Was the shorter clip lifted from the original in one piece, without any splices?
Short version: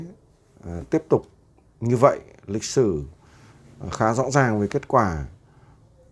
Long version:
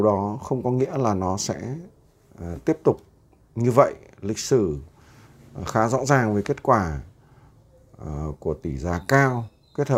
yes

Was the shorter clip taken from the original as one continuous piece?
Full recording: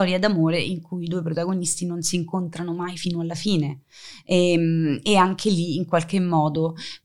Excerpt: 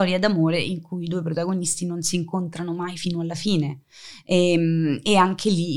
yes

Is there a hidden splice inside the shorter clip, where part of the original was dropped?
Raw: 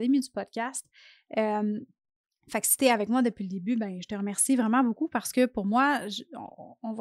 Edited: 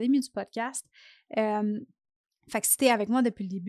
no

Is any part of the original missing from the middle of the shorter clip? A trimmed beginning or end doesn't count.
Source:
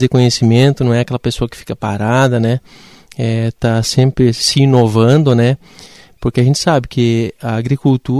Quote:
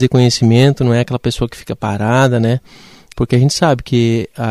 yes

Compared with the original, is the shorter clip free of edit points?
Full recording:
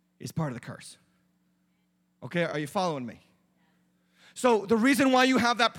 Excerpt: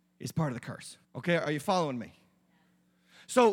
no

